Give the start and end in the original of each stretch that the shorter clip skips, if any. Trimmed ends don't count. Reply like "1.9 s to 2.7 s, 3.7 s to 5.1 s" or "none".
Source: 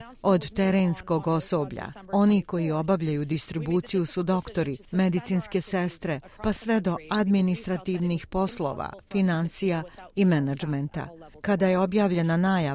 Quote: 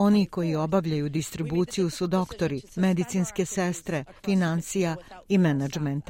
6.3 s to 9.1 s